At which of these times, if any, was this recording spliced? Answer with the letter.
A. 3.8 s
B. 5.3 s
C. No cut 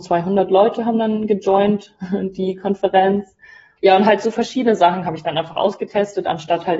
A